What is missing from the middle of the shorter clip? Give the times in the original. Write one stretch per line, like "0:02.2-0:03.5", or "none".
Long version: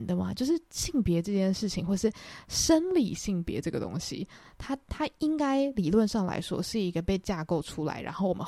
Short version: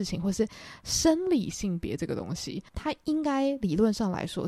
0:04.3-0:04.8

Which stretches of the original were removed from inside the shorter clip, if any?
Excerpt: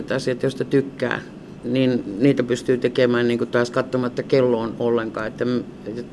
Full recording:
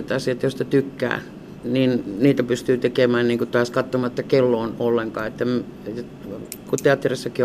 none

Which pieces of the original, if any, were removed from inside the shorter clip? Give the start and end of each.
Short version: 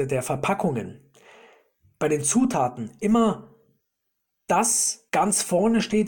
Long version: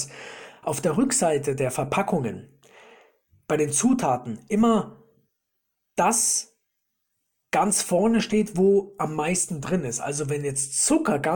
0:06.6-0:07.5

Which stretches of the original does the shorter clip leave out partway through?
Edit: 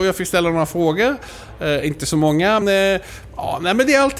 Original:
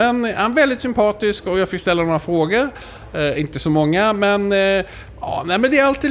0:04.1-0:04.5

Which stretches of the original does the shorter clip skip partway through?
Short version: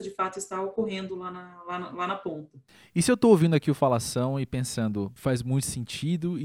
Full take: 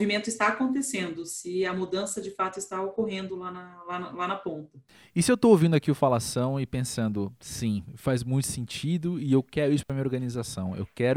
0:07.4-0:08.0

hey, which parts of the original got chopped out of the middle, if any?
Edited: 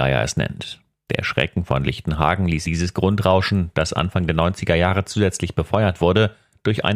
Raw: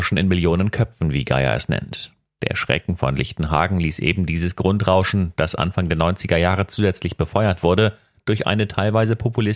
0:04.0-0:04.3

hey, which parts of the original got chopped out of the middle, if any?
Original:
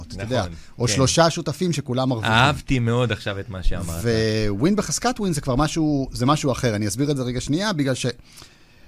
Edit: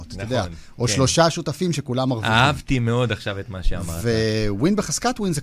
none

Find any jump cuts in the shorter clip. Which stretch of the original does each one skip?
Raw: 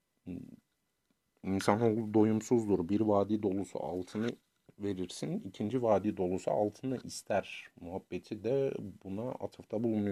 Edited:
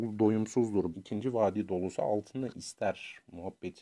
0:02.9-0:05.4

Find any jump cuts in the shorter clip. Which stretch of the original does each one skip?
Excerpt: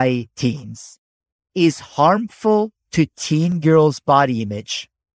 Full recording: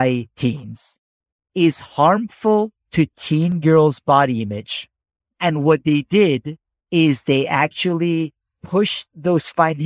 none

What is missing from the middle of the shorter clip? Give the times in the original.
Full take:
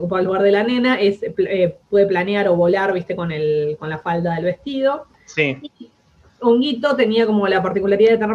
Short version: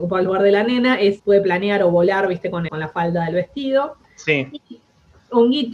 0:01.2-0:01.8
0:03.3-0:03.8

